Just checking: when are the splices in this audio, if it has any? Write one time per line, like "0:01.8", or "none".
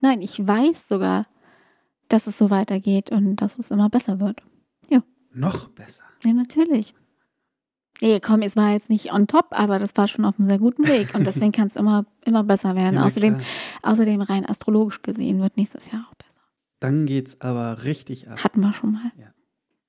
none